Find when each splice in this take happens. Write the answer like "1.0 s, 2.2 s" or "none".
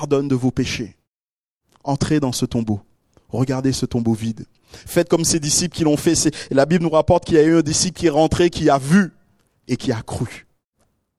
none